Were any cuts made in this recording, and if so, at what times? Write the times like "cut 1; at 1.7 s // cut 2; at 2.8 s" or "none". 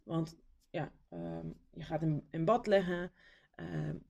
cut 1; at 1.1 s